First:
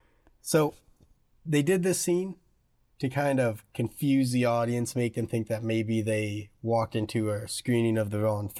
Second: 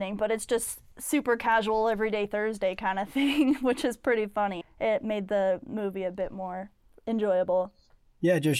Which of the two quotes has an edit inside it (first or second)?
second